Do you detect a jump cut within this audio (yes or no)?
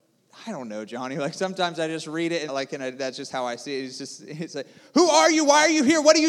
yes